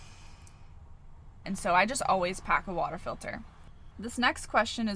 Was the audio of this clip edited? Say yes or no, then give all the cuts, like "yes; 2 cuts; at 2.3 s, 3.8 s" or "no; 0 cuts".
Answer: yes; 2 cuts; at 1.4 s, 3.9 s